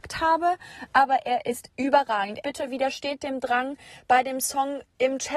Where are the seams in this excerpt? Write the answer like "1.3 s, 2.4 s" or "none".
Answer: 2.4 s